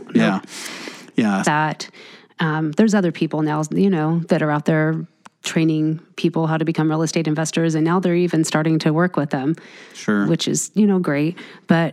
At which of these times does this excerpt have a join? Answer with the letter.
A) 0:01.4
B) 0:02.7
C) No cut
A